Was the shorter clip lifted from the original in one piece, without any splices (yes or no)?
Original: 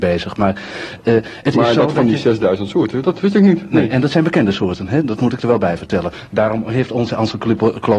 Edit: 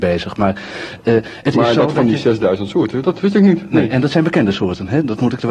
yes